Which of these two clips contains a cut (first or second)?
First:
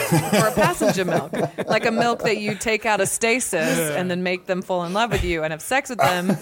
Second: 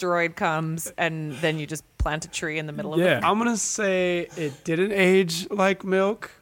second